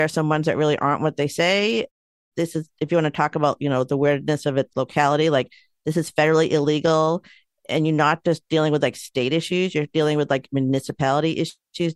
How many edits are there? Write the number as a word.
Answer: one